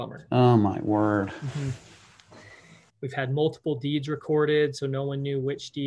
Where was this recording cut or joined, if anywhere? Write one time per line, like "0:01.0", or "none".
0:02.9